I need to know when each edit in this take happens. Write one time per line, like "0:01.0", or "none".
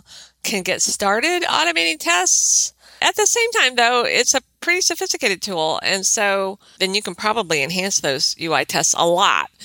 0:06.8